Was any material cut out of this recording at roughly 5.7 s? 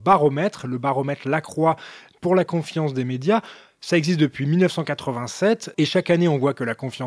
yes; 1 cut; at 5.7 s

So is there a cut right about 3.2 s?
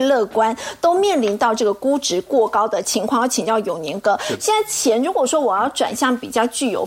no; 0 cuts

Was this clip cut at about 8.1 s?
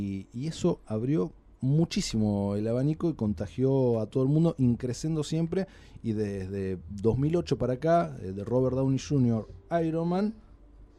no; 0 cuts

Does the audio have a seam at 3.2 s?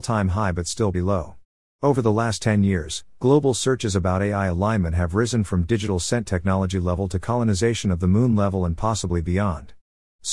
no; 1 cut; at 0.9 s

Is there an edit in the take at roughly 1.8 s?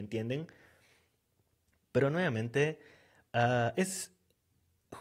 no; 1 cut; at 3.7 s

